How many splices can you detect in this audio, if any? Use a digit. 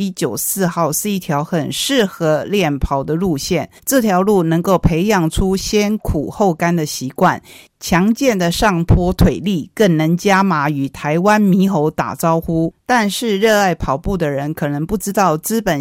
2